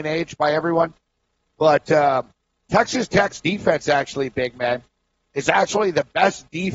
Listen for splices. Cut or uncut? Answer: uncut